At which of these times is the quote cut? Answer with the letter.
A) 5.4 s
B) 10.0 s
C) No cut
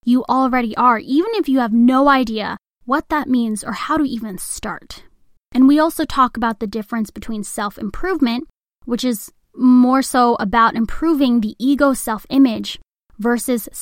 A